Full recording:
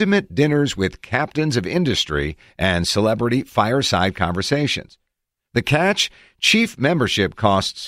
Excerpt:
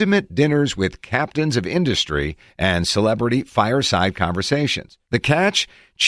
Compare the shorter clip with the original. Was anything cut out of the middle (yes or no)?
yes